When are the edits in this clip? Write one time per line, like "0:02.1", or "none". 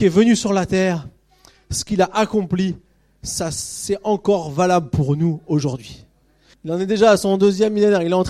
0:06.5